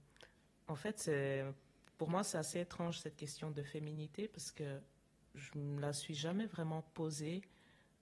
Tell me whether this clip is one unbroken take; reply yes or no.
yes